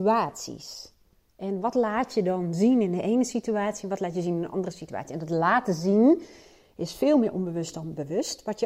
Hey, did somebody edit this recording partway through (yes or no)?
no